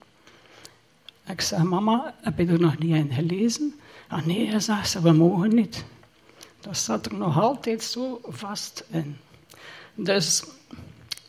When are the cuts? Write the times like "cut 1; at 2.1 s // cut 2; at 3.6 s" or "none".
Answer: cut 1; at 1.1 s